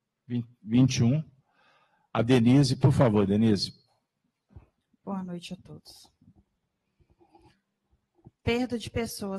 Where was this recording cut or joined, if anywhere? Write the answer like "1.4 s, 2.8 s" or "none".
none